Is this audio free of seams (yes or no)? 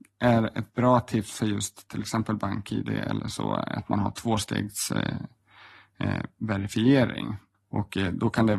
no